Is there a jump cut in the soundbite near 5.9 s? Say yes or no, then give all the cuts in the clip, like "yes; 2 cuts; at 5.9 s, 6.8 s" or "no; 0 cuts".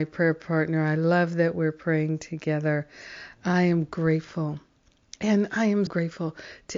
yes; 1 cut; at 5.9 s